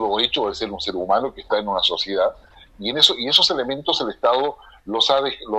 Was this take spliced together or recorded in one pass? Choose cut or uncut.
uncut